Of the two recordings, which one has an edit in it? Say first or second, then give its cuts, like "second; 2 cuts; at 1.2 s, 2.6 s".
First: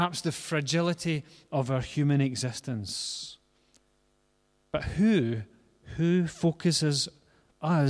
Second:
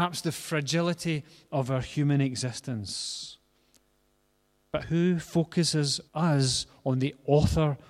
second; 2 cuts; at 4.8 s, 6.1 s